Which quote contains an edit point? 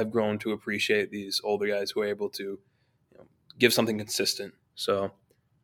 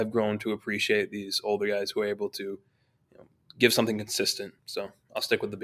first; 1 cut; at 4.6 s

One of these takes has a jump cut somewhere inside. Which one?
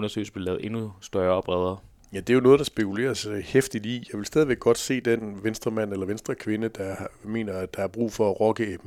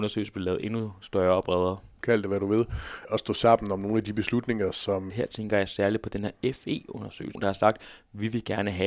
second; 3 cuts; at 2.0 s, 5.1 s, 7.3 s

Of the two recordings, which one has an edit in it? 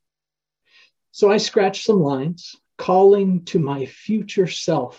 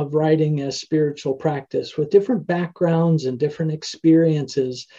first; 1 cut; at 2.7 s

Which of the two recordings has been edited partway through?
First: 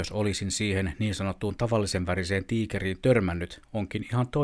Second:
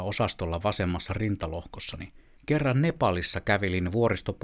second; 1 cut; at 2.4 s

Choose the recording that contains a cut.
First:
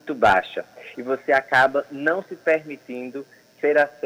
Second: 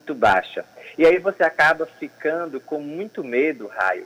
first; 1 cut; at 0.9 s

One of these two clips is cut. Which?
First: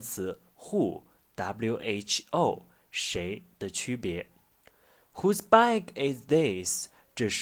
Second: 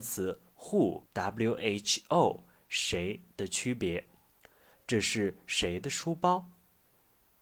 second; 2 cuts; at 1.1 s, 4.7 s

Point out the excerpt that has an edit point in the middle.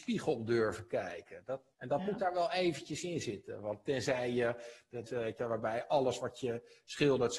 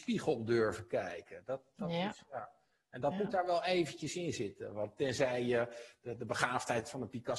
first; 2 cuts; at 1.7 s, 5.1 s

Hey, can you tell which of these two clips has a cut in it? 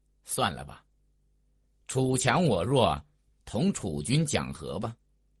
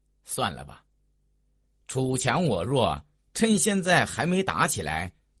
first; 1 cut; at 3.3 s

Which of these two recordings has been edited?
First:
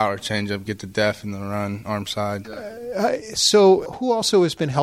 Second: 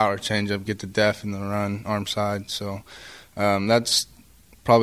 first; 2 cuts; at 2.4 s, 3.9 s

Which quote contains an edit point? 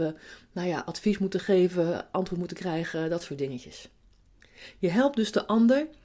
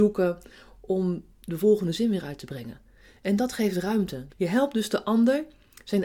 second; 1 cut; at 4.3 s

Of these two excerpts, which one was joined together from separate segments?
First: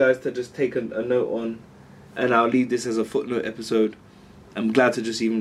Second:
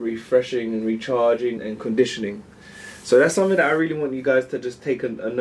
second; 1 cut; at 1.6 s

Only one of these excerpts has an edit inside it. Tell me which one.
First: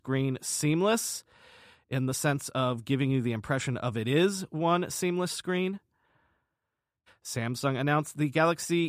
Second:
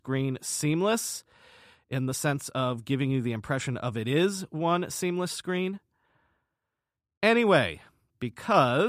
first; 1 cut; at 7.1 s

